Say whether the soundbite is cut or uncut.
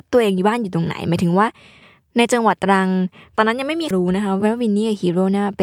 cut